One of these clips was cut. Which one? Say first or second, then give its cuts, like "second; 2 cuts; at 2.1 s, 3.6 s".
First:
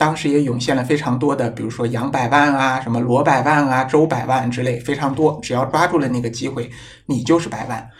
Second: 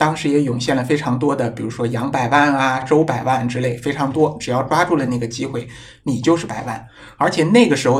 second; 1 cut; at 2.8 s